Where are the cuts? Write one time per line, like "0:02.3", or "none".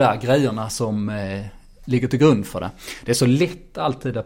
none